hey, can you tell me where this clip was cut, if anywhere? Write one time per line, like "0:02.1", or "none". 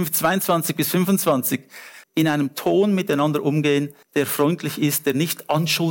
0:02.0
0:04.0